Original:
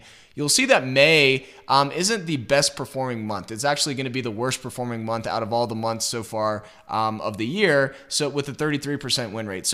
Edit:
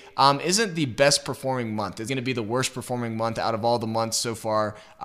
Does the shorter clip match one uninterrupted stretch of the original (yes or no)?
no